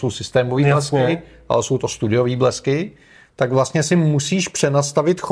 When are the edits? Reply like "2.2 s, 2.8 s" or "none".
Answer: none